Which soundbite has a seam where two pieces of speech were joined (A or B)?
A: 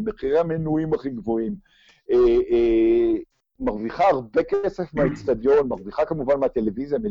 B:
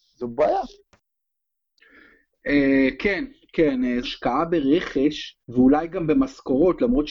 B